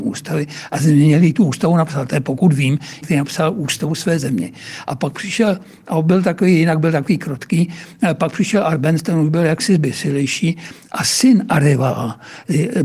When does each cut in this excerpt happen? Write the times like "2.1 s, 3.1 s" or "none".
3.0 s